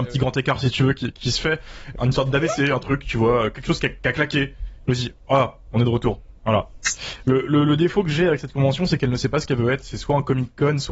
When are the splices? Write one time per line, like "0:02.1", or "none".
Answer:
0:01.9